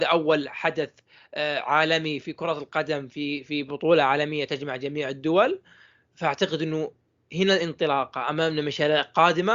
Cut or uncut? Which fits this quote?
uncut